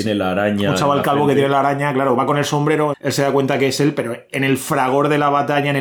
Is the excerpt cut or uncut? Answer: cut